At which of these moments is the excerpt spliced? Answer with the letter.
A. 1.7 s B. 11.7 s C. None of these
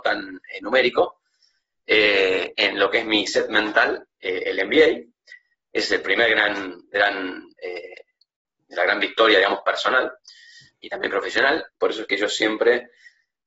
B